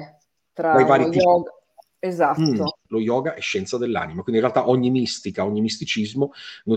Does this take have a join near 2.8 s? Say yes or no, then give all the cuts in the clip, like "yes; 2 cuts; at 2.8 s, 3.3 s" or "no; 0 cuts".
yes; 1 cut; at 2.8 s